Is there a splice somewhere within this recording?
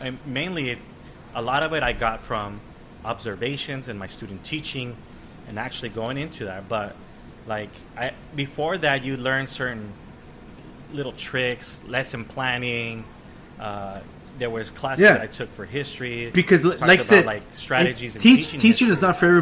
no; 0 cuts

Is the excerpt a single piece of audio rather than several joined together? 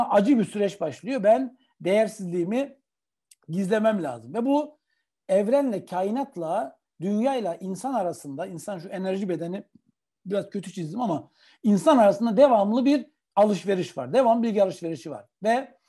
yes; 0 cuts

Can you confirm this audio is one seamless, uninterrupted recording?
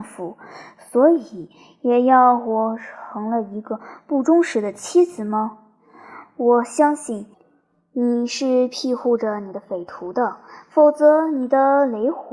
yes; 0 cuts

